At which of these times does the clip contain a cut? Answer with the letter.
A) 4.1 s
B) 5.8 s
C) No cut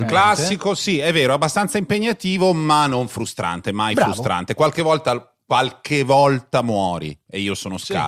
C